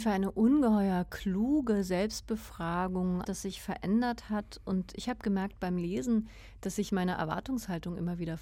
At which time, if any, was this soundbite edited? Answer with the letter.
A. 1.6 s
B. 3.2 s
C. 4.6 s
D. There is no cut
B